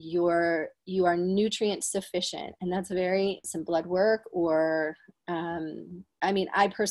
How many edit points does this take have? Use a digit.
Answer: 1